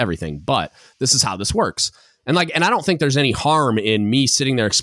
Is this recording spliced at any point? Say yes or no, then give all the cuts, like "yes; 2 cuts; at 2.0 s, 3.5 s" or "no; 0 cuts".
no; 0 cuts